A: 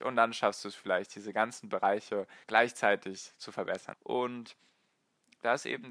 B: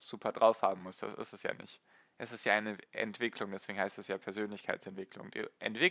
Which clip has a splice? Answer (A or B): A